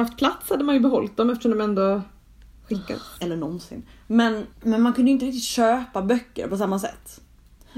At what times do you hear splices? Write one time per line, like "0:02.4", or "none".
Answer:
0:03.2
0:04.5